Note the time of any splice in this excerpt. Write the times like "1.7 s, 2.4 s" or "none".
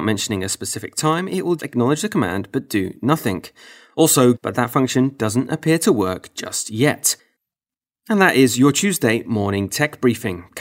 1.6 s, 4.3 s